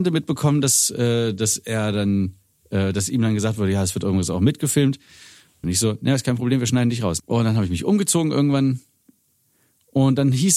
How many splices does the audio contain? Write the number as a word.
two